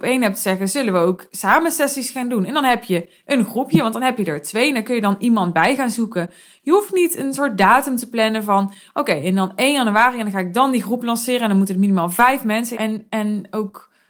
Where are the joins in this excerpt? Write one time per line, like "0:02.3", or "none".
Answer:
0:12.7